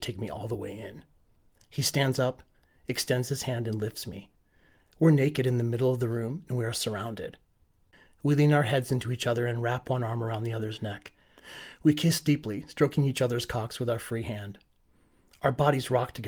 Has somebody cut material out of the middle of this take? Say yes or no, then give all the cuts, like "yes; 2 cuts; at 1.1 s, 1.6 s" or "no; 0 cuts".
no; 0 cuts